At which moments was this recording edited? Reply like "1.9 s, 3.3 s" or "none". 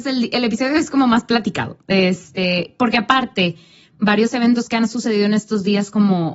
none